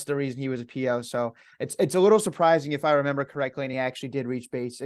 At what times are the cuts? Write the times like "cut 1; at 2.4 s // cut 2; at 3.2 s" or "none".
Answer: none